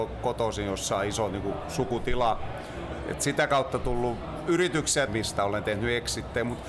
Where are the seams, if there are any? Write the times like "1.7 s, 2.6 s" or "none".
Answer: 5.1 s